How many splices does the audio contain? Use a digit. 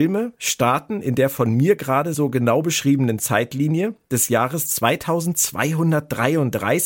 0